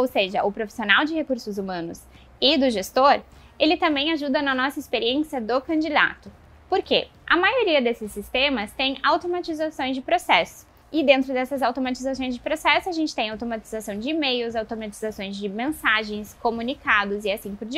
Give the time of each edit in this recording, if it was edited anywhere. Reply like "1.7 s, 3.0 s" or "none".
none